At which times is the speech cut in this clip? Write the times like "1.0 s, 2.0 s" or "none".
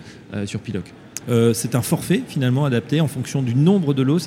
1.2 s